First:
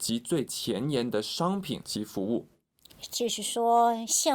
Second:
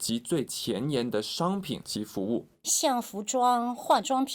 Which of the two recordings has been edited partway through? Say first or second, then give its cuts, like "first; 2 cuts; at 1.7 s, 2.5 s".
second; 1 cut; at 2.6 s